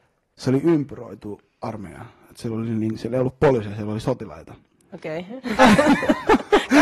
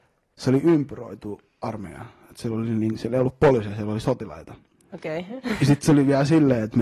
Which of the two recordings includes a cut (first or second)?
first